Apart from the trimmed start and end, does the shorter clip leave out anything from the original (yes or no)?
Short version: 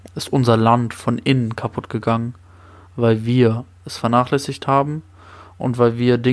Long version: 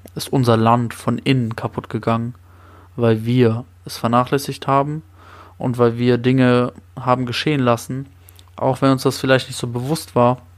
no